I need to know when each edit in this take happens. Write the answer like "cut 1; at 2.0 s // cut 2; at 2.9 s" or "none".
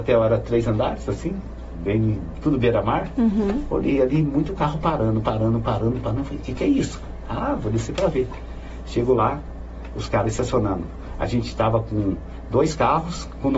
none

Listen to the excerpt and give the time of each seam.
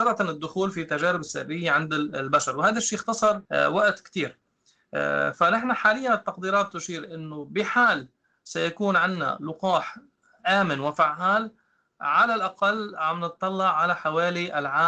cut 1; at 3.4 s

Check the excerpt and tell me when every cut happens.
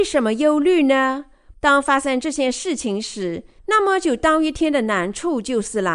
cut 1; at 1.5 s // cut 2; at 3.6 s

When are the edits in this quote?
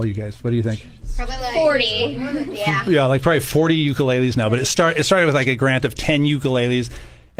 none

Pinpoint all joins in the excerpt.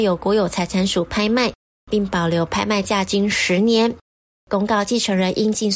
cut 1; at 4.3 s

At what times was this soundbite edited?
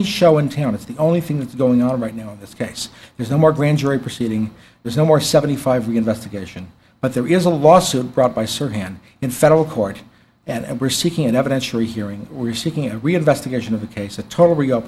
none

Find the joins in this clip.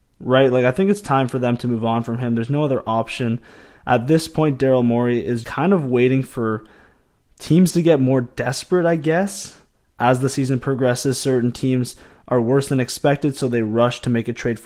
cut 1; at 5.4 s

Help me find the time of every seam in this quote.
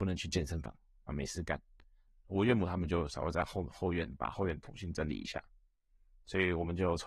none

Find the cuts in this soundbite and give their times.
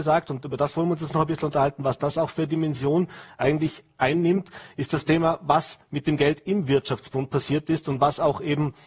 none

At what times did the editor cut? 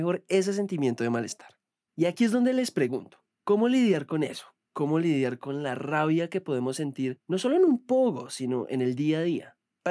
cut 1; at 1.9 s

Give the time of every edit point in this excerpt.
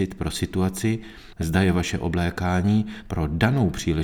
cut 1; at 1.3 s

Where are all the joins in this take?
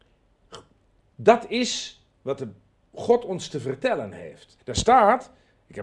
cut 1; at 1.0 s // cut 2; at 4.6 s

